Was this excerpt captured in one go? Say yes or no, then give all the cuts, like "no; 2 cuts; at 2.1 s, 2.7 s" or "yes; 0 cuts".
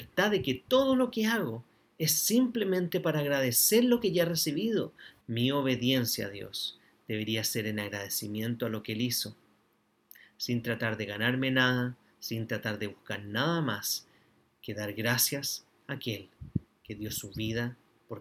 no; 1 cut; at 5.2 s